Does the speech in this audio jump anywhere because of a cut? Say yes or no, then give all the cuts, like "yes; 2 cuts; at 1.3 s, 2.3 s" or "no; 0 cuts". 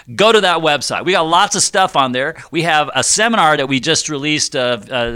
no; 0 cuts